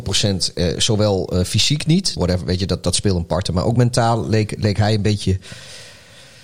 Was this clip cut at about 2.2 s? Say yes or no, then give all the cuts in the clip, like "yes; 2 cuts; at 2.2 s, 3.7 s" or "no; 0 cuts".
yes; 1 cut; at 2.2 s